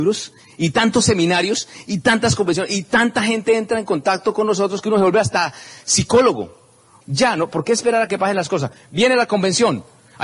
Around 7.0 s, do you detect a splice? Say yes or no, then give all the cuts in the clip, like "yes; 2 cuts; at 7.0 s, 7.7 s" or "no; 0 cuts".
no; 0 cuts